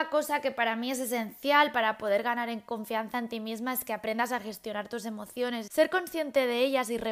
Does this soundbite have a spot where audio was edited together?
yes; 1 cut; at 5.7 s

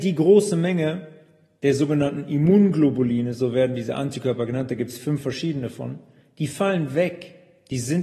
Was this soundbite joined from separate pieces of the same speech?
no; 0 cuts

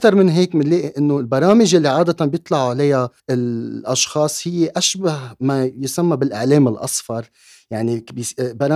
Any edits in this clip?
yes; 1 cut; at 3.2 s

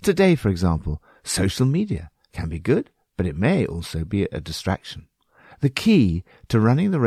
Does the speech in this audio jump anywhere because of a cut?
no; 0 cuts

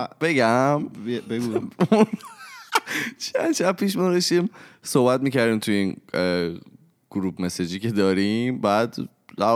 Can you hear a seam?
no; 0 cuts

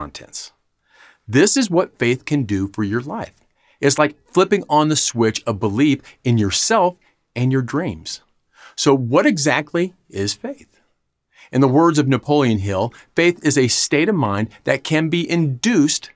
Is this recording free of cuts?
yes; 0 cuts

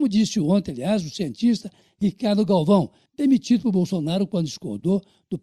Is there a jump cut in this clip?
yes; 1 cut; at 3.1 s

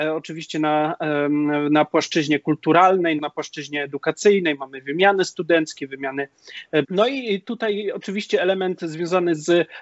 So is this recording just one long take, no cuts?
no; 2 cuts; at 3.2 s, 6.8 s

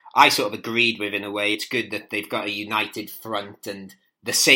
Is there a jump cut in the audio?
no; 0 cuts

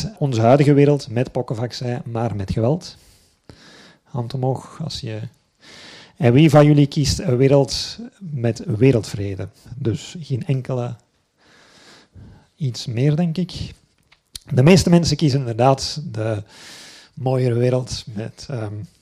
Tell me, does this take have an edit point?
no; 0 cuts

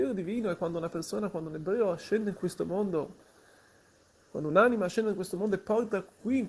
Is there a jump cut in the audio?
no; 0 cuts

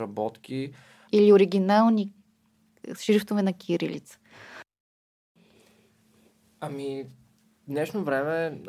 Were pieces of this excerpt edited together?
yes; 1 cut; at 1.1 s

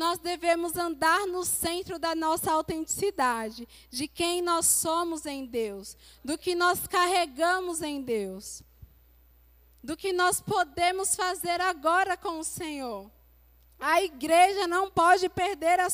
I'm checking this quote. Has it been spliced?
no; 0 cuts

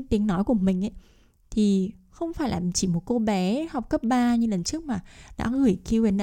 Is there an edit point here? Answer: no; 0 cuts

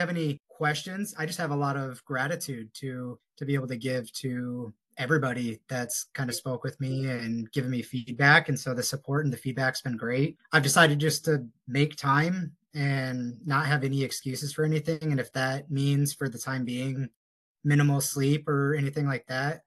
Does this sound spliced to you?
no; 0 cuts

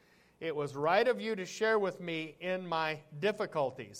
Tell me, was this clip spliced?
no; 0 cuts

